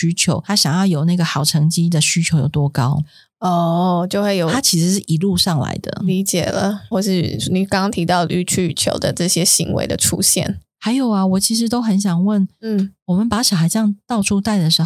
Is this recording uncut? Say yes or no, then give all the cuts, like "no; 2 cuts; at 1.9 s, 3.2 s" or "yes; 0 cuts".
no; 1 cut; at 6.9 s